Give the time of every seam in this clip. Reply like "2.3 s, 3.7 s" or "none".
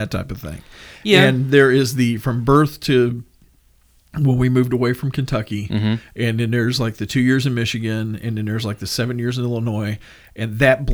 none